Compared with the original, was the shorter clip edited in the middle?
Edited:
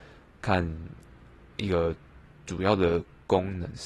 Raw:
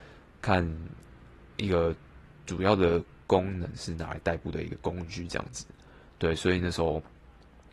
no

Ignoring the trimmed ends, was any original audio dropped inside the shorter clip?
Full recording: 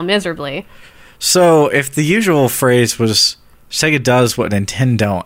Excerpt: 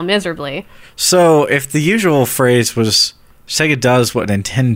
yes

